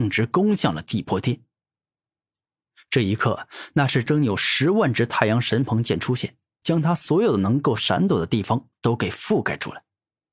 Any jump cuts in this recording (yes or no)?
yes